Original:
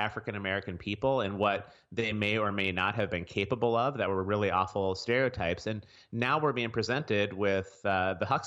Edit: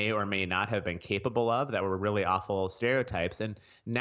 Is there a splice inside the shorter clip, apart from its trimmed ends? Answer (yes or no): no